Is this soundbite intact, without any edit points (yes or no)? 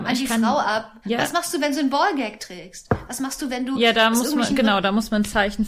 no